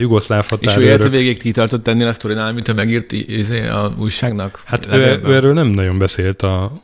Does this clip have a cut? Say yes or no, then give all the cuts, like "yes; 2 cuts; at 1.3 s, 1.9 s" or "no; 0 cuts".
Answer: no; 0 cuts